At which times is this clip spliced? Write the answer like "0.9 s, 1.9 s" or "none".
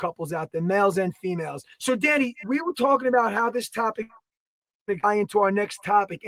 1.7 s